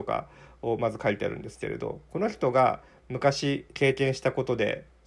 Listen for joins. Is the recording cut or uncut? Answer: cut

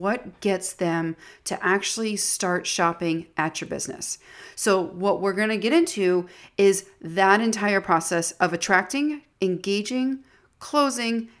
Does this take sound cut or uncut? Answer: cut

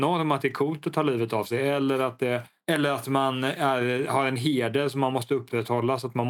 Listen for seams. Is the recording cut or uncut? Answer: uncut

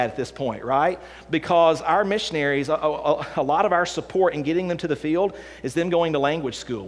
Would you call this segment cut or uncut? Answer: uncut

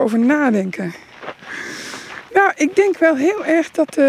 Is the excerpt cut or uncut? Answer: uncut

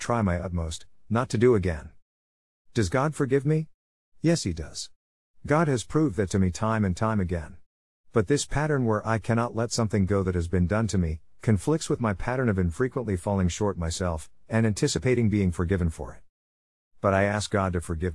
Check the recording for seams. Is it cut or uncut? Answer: uncut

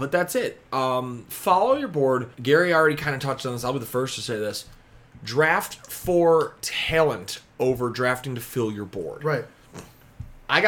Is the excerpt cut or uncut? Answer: cut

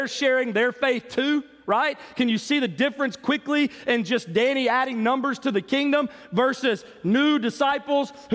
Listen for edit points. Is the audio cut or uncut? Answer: uncut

